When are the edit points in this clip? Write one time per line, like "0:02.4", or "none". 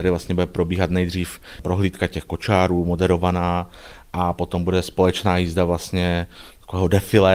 none